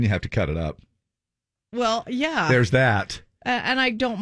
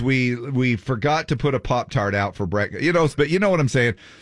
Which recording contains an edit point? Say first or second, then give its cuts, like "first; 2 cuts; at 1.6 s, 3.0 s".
second; 1 cut; at 3.2 s